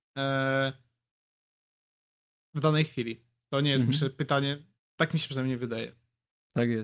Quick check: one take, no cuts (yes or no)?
no